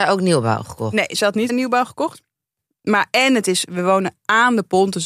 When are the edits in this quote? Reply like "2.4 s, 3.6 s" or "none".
1.5 s